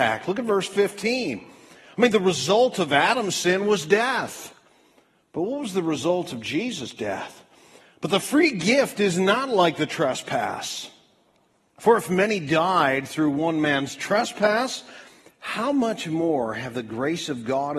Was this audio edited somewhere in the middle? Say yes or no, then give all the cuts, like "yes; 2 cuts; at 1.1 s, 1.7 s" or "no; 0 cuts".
no; 0 cuts